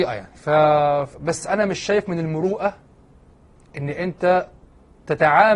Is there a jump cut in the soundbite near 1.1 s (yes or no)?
yes